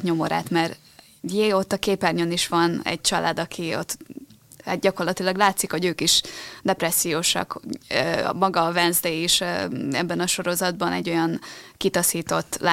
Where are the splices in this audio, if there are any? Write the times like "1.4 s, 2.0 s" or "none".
none